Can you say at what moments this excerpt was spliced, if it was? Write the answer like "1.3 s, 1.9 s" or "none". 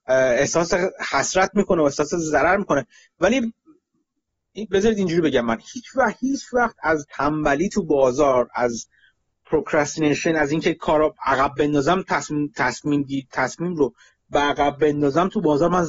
none